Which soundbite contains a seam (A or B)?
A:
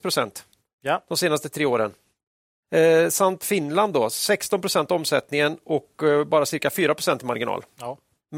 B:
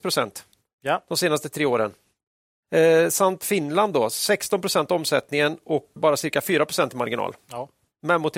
B